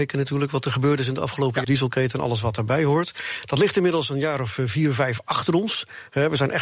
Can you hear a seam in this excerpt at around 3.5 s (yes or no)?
no